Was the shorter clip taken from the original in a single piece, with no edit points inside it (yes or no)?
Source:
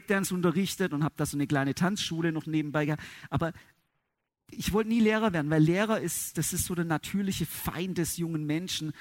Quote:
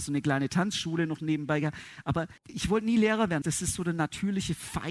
no